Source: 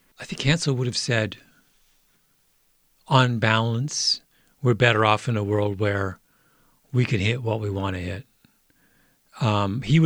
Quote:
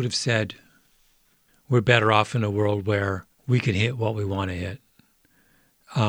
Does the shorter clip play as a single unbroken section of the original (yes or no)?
no